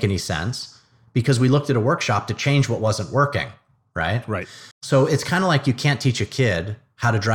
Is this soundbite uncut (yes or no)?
no